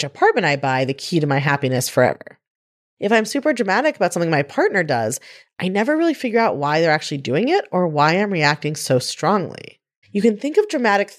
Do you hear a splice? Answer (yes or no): yes